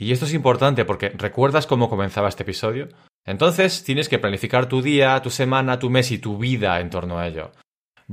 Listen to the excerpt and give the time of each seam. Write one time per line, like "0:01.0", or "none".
0:03.1